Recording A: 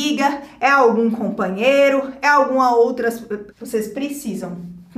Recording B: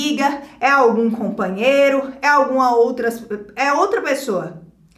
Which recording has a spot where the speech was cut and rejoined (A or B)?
A